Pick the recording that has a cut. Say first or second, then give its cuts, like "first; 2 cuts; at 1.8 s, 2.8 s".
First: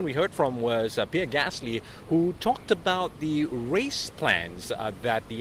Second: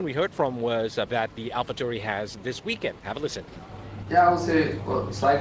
second; 2 cuts; at 1.1 s, 4.1 s